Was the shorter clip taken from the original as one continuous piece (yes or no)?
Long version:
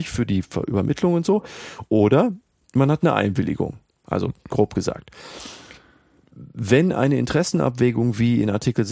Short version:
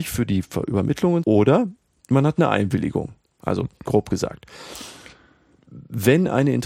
no